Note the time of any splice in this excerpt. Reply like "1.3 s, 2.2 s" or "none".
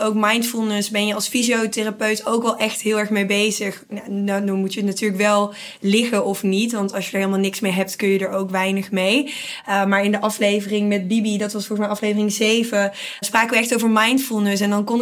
13.2 s